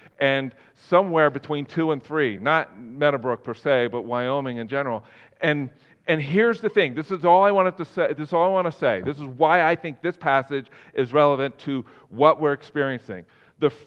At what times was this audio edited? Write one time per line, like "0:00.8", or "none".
none